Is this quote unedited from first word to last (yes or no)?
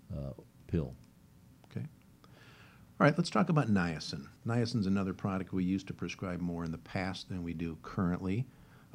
no